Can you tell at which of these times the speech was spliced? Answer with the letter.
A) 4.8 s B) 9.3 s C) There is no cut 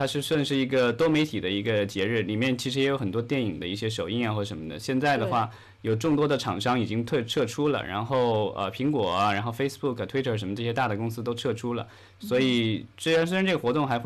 C